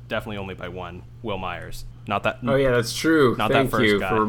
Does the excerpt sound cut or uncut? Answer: uncut